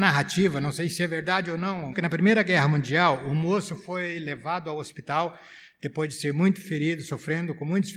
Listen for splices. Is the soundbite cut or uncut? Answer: cut